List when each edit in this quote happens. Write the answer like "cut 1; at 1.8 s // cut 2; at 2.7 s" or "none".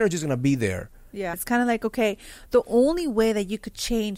cut 1; at 1.3 s